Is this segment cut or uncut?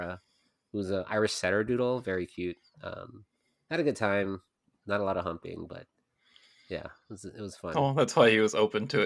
uncut